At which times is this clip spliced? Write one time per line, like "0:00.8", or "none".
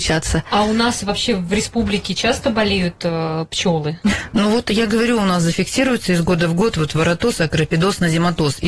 none

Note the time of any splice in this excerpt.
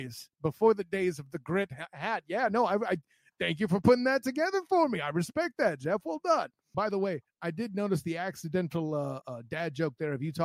0:06.7
0:09.2

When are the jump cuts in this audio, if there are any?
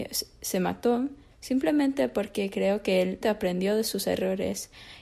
0:01.3
0:03.2

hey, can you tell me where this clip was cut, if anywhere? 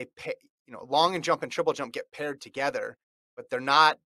none

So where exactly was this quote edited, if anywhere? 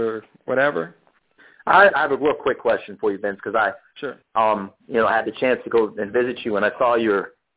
0:01.9

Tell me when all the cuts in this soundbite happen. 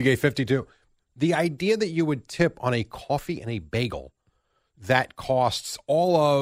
0:01.0

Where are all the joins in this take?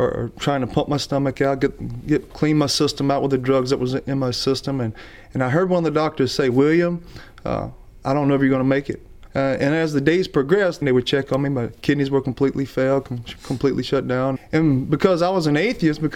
0:09.3
0:10.8
0:14.4

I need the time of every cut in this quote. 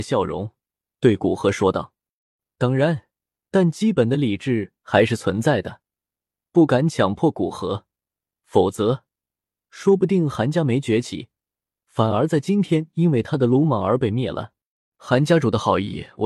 0:03.4

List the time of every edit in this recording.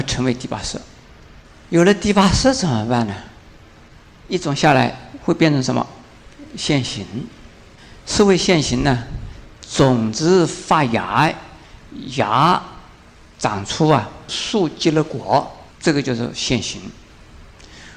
0:14.3
0:15.7

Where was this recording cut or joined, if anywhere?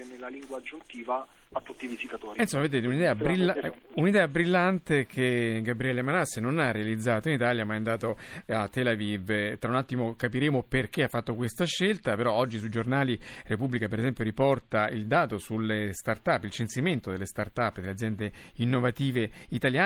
none

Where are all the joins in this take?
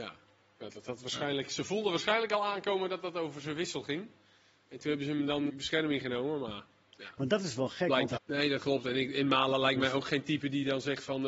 0:05.5
0:08.2

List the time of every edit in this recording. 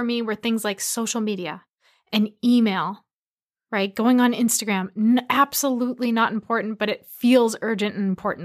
none

